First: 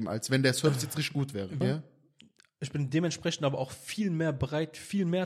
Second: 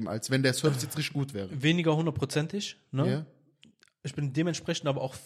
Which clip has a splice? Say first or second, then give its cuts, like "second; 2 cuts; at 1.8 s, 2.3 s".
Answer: first; 1 cut; at 1.6 s